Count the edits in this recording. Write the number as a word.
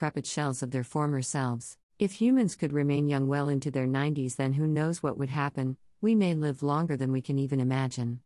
one